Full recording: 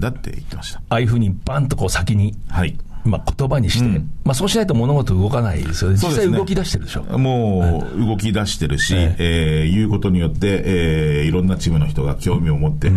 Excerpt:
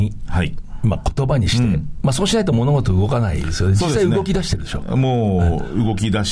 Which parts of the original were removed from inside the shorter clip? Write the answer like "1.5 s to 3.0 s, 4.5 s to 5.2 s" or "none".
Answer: none